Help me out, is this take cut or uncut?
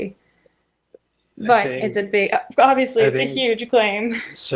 uncut